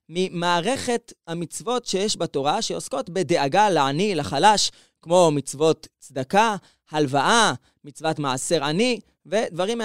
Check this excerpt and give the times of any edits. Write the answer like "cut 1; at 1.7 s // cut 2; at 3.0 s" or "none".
none